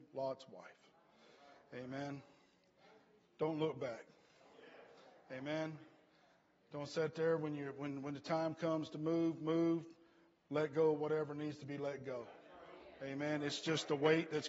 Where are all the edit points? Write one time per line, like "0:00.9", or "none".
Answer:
none